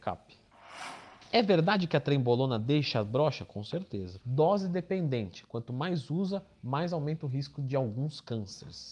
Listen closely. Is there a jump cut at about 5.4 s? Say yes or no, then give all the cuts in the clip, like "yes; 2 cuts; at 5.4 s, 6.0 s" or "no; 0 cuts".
no; 1 cut; at 4.2 s